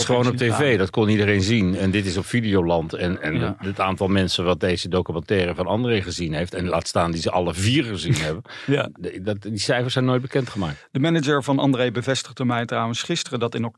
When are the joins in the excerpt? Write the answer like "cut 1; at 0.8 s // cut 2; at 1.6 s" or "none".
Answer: none